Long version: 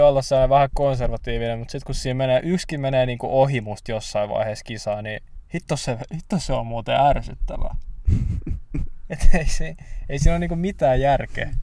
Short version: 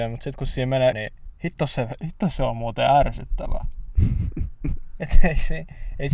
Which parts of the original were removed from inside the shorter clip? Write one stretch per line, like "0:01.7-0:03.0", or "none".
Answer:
0:02.4-0:05.0